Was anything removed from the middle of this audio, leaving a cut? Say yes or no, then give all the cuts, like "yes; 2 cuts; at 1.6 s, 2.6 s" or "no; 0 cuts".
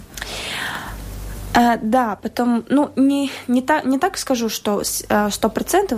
no; 0 cuts